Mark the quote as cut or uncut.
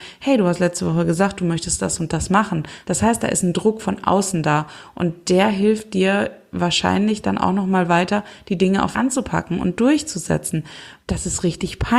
cut